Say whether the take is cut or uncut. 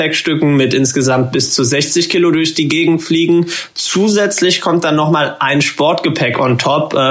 uncut